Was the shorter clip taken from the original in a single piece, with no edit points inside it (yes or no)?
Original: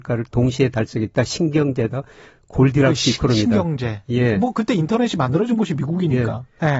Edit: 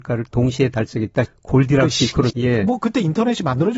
no